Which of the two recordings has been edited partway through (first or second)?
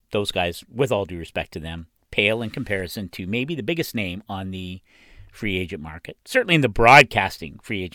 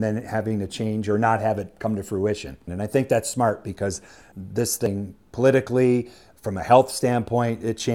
second